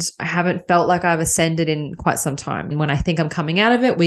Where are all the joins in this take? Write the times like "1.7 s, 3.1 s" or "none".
2.7 s